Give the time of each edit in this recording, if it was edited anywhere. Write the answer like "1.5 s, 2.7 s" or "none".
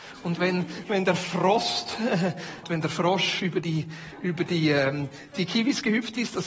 2.6 s